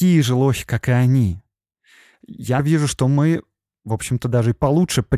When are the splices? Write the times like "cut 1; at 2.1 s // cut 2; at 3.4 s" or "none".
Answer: cut 1; at 2.6 s